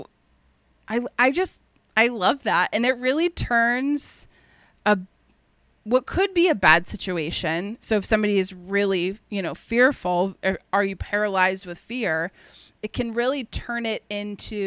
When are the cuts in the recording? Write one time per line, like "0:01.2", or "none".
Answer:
none